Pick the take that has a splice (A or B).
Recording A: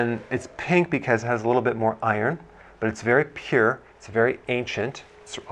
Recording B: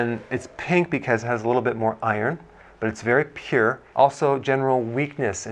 B